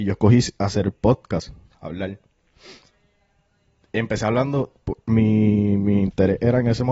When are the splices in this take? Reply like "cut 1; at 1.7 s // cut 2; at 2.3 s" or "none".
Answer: none